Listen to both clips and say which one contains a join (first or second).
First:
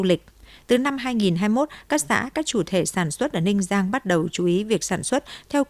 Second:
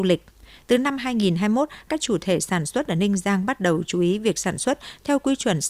second